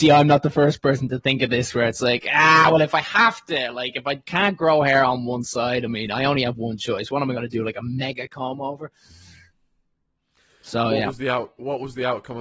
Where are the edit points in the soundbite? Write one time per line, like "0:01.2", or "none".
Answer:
none

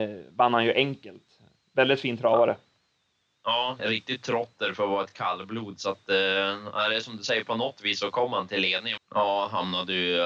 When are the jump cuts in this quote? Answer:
0:03.8
0:09.0

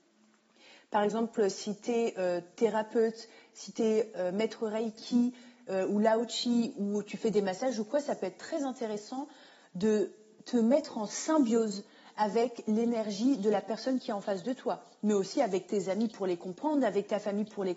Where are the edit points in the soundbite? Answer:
none

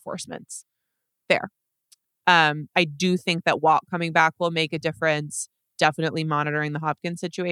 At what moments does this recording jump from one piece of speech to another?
0:02.2

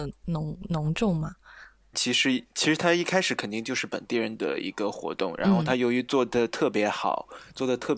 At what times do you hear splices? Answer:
0:01.9

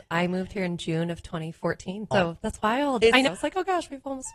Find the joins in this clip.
0:02.1
0:03.3

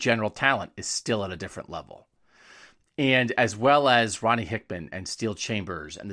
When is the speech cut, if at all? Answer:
none

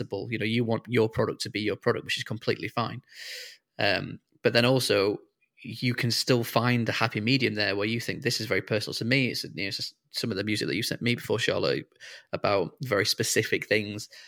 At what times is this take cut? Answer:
none

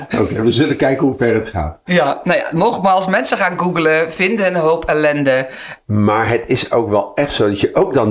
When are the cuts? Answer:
0:05.8

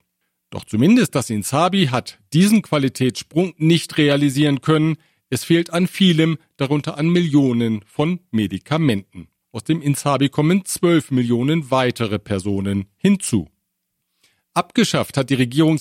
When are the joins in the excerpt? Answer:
0:09.4

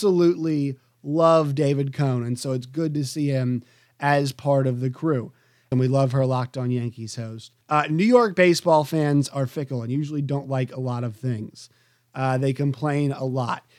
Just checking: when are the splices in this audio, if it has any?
0:05.7
0:07.6

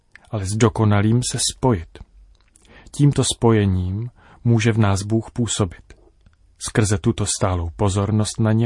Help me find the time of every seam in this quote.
none

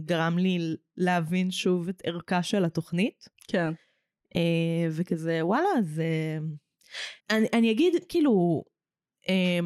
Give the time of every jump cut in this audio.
0:07.2

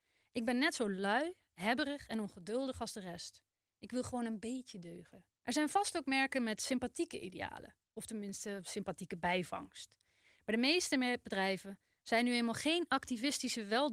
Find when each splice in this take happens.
0:05.4

